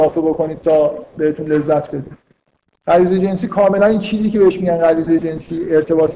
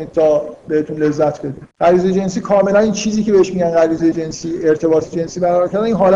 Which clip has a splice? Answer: second; 1 cut; at 1.7 s

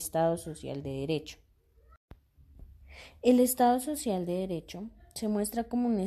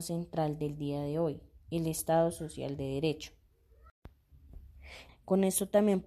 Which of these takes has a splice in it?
second; 1 cut; at 5.1 s

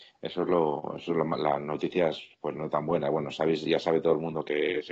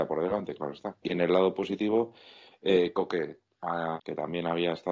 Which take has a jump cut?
second; 2 cuts; at 1.0 s, 4.0 s

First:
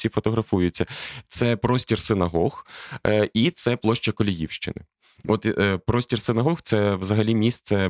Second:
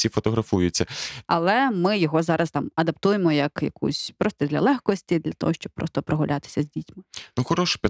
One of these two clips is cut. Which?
second; 1 cut; at 1.2 s

